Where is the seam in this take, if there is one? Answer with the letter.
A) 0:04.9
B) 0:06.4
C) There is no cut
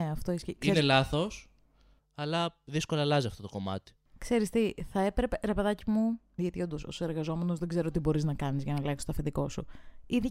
B